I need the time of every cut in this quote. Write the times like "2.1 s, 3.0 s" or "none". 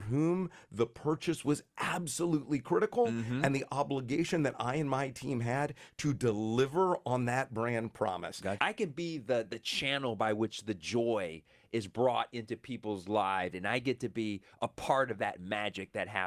8.6 s, 13.5 s